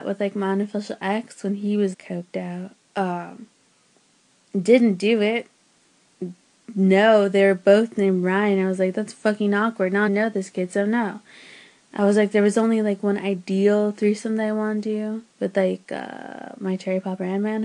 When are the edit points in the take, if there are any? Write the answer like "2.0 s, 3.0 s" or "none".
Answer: 1.9 s, 10.1 s, 15.3 s